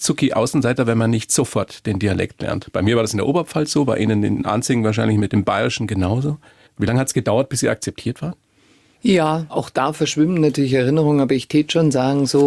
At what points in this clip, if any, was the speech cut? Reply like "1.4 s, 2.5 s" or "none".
9.5 s